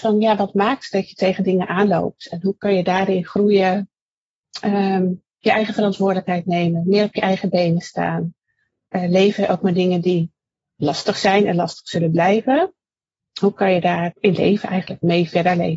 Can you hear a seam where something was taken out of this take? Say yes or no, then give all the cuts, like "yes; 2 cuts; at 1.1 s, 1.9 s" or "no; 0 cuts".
yes; 1 cut; at 14.1 s